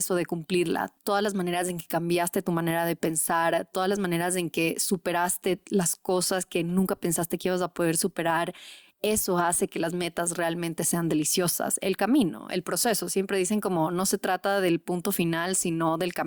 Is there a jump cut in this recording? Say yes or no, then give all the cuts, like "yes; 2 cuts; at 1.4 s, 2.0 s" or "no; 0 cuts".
yes; 1 cut; at 1.0 s